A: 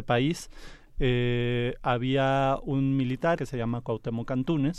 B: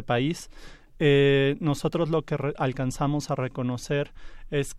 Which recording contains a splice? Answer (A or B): A